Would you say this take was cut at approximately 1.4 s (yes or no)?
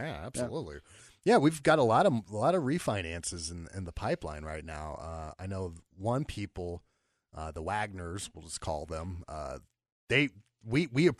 no